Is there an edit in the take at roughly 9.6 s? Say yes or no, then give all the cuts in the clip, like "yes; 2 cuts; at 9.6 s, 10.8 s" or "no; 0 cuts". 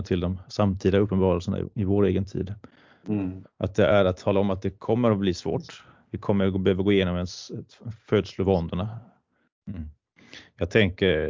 yes; 2 cuts; at 3.4 s, 9.6 s